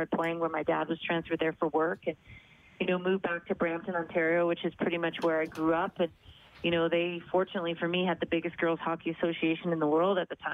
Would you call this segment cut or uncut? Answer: uncut